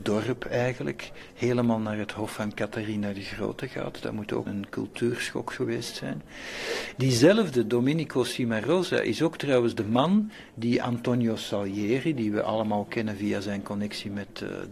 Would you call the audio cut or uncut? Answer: cut